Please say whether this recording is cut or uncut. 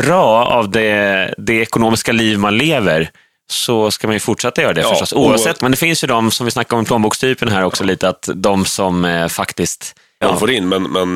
cut